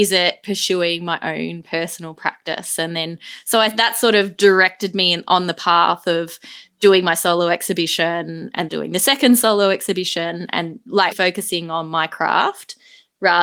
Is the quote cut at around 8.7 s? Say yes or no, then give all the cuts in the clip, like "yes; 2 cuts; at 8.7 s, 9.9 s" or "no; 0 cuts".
yes; 2 cuts; at 8.7 s, 11.1 s